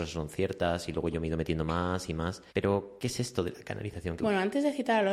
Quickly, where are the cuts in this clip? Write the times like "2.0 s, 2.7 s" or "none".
2.5 s, 4.2 s